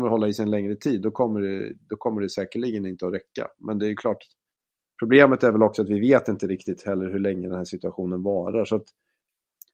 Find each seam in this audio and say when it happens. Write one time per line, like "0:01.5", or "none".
none